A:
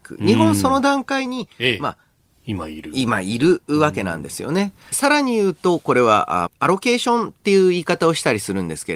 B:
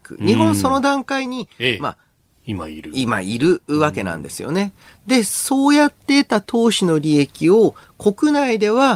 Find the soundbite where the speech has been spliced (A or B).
A